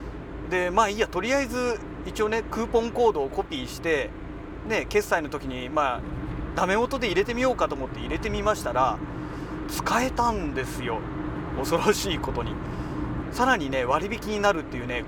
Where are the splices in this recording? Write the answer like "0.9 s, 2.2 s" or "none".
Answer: 13.2 s